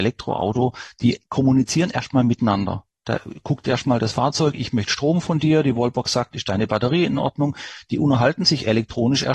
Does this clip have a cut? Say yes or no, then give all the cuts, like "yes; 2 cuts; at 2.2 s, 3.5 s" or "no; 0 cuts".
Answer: no; 0 cuts